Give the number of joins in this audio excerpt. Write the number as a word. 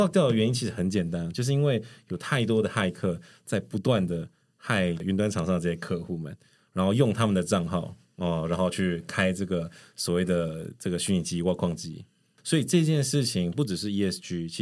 zero